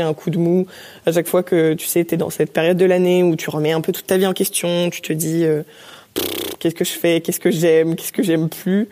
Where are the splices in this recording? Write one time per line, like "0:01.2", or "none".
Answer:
none